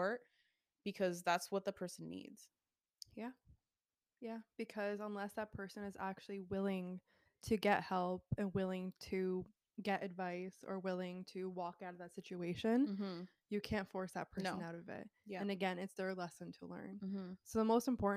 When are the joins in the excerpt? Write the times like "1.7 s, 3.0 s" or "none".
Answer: none